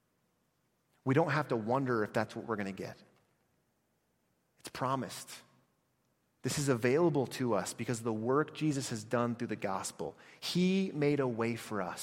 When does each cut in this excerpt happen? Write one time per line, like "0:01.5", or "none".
none